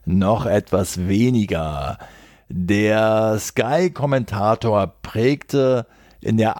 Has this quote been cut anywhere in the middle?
no; 0 cuts

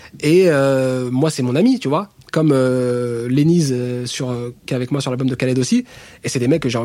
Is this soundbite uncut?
yes; 0 cuts

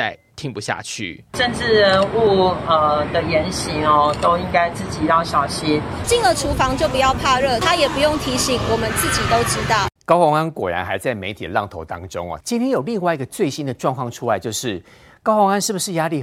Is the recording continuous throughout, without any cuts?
no; 3 cuts; at 6.0 s, 10.0 s, 12.4 s

